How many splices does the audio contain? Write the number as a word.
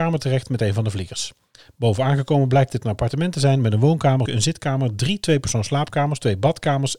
one